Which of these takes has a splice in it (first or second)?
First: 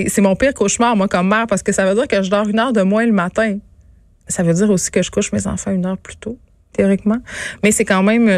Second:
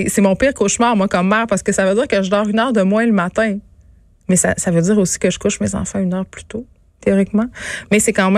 first